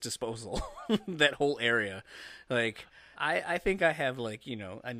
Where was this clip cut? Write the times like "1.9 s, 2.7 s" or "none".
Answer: 3.1 s